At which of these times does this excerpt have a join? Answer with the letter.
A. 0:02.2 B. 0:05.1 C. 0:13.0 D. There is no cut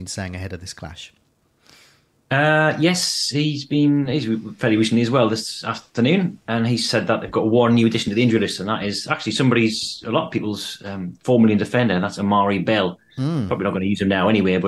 D